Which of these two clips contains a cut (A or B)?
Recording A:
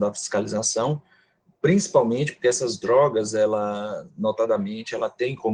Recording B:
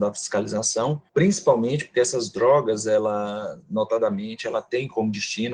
B